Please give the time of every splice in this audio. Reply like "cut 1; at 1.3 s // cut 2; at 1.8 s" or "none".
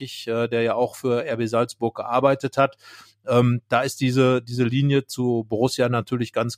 none